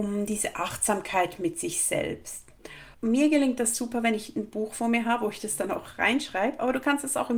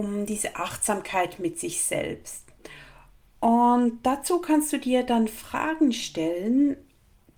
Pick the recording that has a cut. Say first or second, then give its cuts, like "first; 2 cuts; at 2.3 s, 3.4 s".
first; 1 cut; at 2.9 s